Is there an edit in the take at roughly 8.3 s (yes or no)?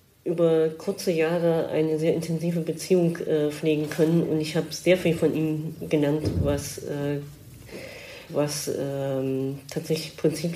yes